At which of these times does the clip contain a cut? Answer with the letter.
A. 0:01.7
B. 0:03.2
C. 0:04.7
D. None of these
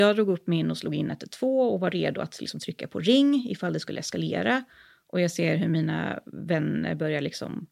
D